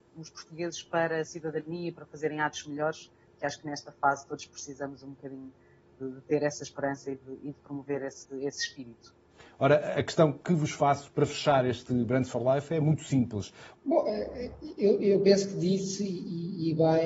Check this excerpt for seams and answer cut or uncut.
cut